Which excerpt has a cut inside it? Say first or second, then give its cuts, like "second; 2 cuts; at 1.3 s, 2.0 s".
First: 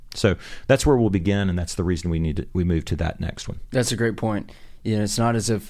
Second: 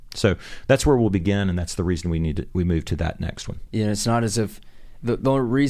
second; 1 cut; at 3.7 s